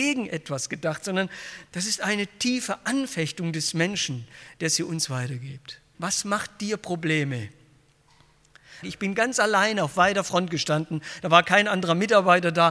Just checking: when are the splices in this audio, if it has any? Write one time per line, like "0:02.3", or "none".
0:05.9
0:08.8